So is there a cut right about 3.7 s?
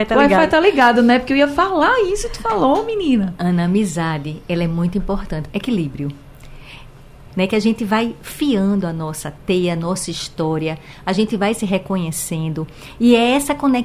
no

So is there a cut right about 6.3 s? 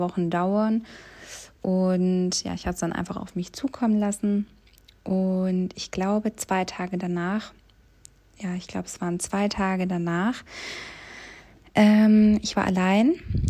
no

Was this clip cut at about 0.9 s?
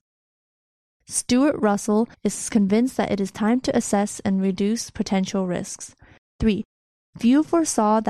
no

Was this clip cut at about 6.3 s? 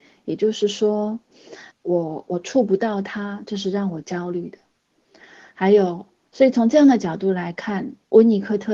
yes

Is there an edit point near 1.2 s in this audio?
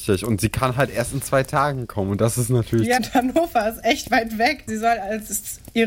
no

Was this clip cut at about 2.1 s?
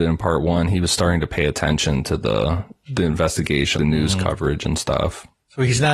no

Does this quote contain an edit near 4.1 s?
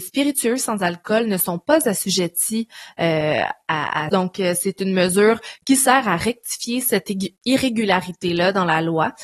yes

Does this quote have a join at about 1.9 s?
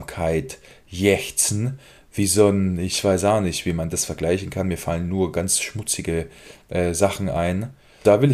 no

